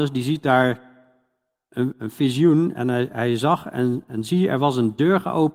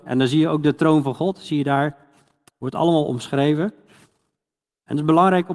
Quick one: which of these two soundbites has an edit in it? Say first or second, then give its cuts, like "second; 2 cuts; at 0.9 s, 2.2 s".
first; 1 cut; at 2.7 s